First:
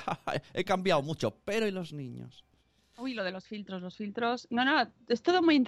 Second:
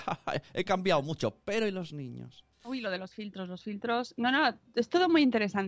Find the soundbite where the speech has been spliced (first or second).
second